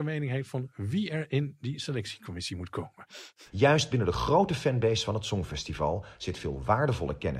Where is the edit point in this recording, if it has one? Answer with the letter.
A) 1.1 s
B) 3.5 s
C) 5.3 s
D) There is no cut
B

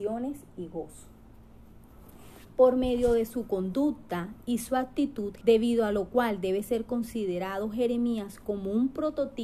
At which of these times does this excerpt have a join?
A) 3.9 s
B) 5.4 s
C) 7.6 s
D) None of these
B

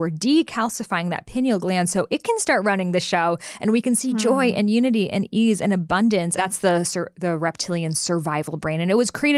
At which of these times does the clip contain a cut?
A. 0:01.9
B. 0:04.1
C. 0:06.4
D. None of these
C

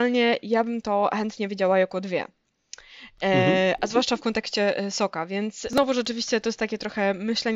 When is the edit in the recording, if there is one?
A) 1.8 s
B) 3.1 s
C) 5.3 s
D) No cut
D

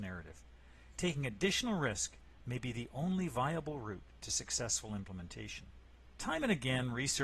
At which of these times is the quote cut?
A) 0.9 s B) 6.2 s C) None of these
B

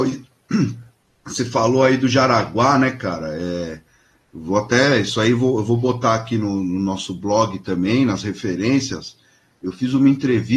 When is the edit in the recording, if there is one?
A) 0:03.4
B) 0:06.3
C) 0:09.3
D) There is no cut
D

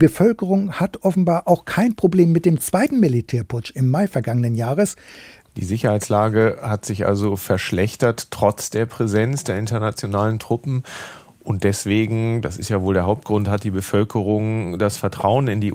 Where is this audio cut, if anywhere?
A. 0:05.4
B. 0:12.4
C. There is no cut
A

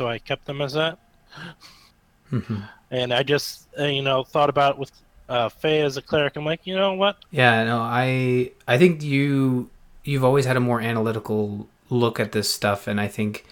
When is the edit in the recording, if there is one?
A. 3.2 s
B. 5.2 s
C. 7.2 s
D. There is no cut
C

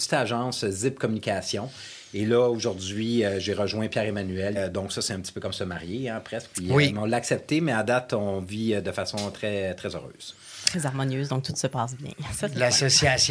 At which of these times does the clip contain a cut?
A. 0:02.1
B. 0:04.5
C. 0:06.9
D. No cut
B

